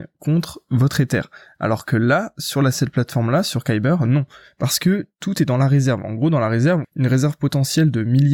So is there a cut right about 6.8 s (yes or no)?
yes